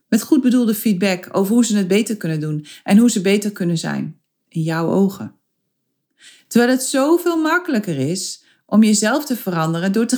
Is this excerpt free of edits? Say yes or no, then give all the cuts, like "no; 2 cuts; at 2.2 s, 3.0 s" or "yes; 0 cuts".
yes; 0 cuts